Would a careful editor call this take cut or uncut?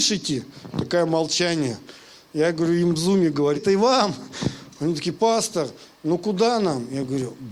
cut